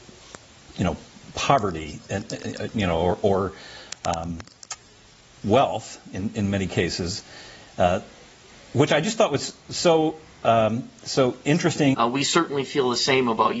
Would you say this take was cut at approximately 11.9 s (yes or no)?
yes